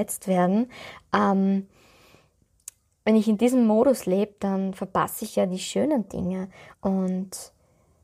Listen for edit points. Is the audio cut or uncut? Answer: cut